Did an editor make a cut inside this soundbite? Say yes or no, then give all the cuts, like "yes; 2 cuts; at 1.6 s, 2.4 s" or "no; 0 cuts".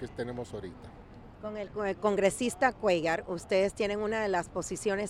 no; 0 cuts